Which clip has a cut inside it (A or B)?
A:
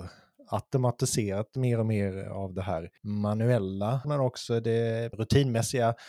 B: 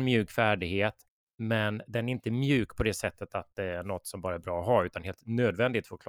A